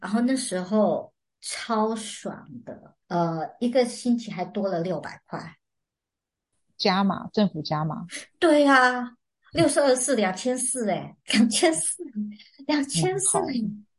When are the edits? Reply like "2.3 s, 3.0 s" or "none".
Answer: 3.0 s